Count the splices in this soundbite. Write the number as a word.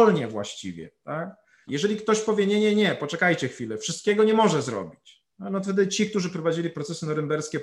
two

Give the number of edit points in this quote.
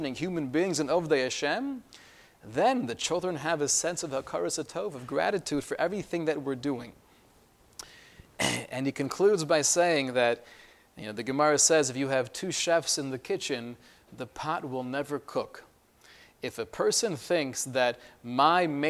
zero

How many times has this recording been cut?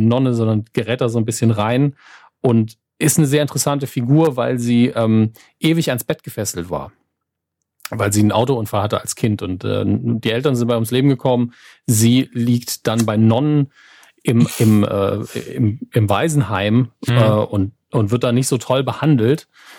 zero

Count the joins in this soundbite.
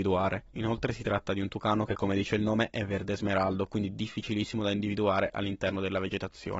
zero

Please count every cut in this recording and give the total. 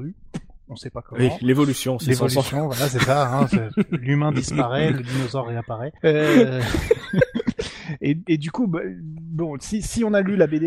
one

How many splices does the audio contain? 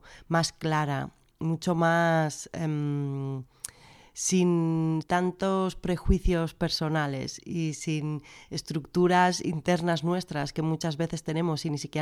one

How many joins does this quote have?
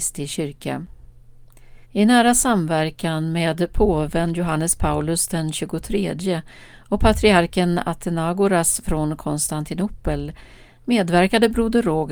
one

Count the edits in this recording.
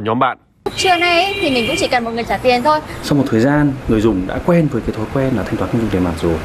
one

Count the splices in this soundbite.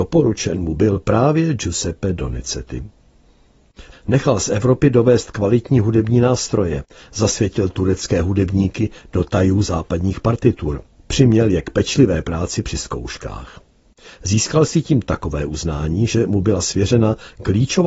one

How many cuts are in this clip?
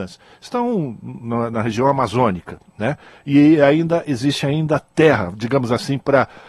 zero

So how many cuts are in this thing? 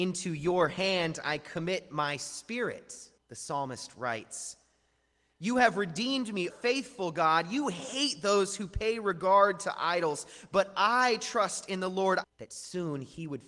three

